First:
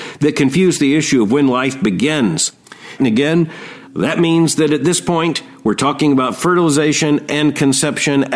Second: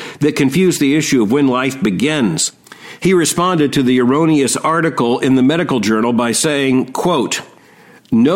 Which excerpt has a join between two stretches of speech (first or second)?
first